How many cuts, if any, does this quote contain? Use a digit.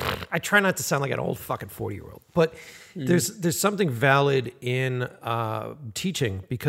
0